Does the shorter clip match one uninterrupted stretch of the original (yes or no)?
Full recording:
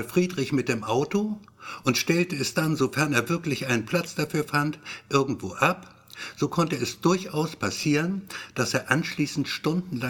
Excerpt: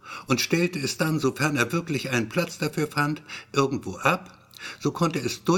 yes